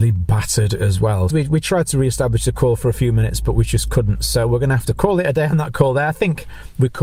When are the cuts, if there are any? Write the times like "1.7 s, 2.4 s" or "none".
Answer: 1.3 s